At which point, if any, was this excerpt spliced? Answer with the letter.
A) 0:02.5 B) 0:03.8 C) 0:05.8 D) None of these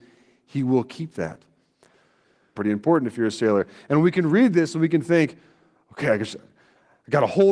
A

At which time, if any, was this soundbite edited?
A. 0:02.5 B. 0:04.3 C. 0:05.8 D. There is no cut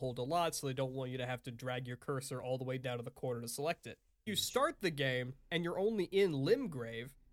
B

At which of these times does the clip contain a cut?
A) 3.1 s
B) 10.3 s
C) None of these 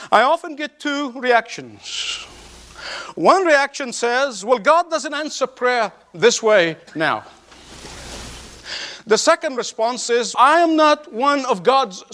B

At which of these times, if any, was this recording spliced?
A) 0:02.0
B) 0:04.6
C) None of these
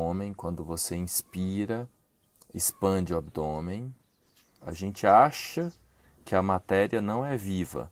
B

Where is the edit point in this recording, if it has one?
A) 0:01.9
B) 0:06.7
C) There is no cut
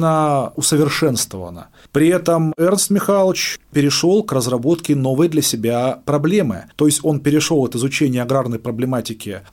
B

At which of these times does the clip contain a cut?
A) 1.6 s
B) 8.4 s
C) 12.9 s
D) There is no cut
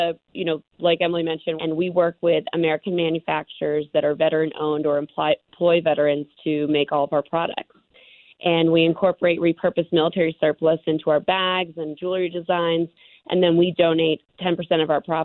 A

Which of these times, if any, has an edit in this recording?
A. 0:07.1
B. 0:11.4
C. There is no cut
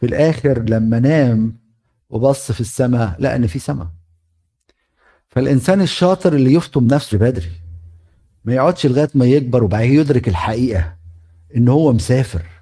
A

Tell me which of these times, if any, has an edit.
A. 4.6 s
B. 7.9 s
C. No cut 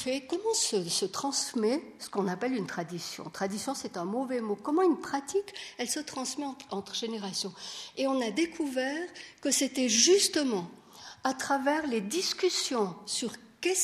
C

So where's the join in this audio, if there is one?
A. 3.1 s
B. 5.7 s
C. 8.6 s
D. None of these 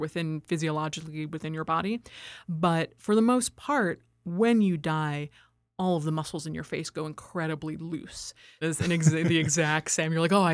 C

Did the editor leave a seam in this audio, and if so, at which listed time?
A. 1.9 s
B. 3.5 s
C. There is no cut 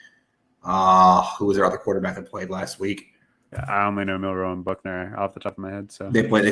B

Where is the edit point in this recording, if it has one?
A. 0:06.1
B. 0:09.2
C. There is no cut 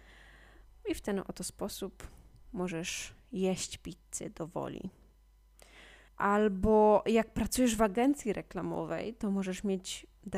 A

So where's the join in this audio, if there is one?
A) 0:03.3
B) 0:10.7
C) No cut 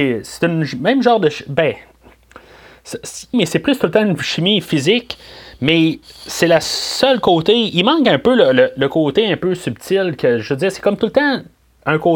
A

